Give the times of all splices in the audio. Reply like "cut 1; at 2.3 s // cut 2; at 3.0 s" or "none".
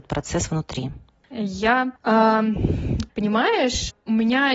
cut 1; at 1.3 s // cut 2; at 3.1 s